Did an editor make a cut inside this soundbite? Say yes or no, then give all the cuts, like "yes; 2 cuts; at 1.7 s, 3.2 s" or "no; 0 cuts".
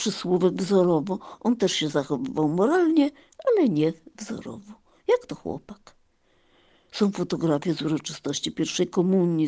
yes; 1 cut; at 6.9 s